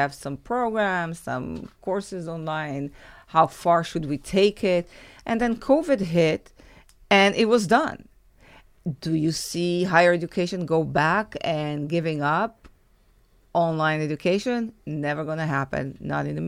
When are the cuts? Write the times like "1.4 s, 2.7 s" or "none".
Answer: none